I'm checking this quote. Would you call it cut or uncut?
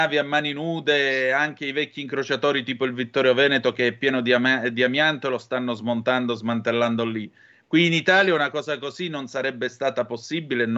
uncut